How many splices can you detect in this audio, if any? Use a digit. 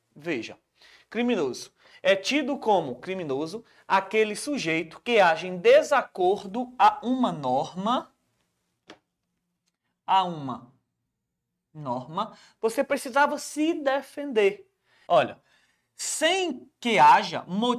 2